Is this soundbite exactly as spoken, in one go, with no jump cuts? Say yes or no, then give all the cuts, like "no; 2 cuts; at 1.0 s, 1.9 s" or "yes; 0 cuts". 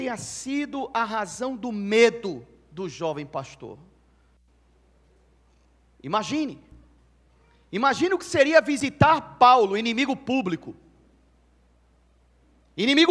yes; 0 cuts